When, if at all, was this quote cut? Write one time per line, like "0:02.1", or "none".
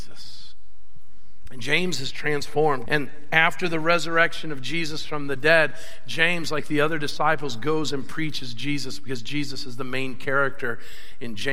0:01.5
0:02.9